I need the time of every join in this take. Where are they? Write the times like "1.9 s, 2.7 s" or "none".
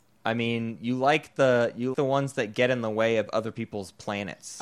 1.9 s

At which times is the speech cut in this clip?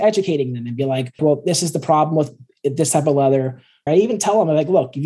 1.2 s, 3.9 s

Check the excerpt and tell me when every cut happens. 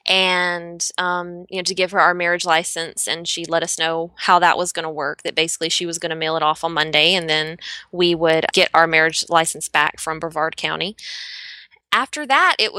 none

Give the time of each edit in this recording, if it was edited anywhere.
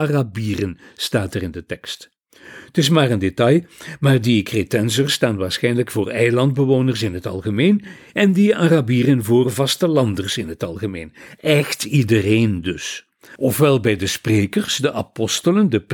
13.4 s

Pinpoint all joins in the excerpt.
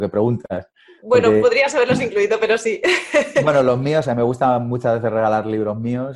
none

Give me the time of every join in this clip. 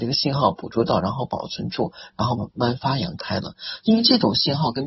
2.4 s

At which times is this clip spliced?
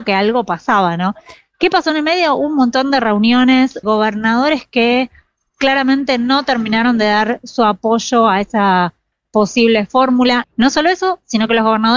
3.8 s, 10.4 s

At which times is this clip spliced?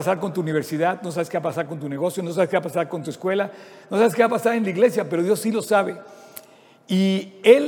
none

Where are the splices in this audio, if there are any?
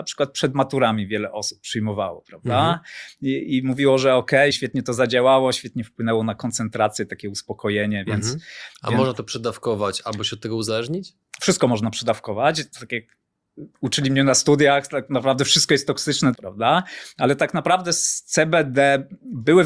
4.5 s, 16.3 s

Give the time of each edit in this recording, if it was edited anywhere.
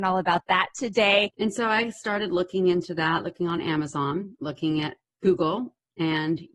1.3 s

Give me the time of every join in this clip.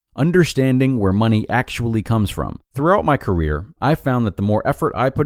2.7 s

